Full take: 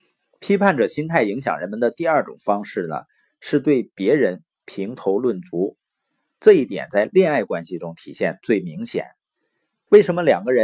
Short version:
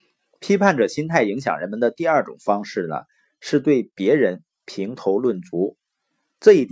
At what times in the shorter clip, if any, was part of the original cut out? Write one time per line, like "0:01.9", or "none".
none